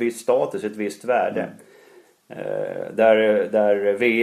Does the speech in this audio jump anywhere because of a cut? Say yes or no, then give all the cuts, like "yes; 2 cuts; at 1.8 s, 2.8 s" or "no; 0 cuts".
no; 0 cuts